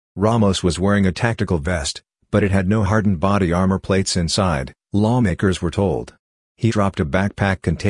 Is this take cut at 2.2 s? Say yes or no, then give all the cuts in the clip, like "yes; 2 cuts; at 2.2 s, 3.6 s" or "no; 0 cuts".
no; 1 cut; at 6.7 s